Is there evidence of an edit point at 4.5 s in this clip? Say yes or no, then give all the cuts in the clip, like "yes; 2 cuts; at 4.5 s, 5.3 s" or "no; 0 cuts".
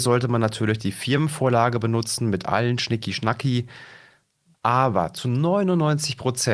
yes; 1 cut; at 4.5 s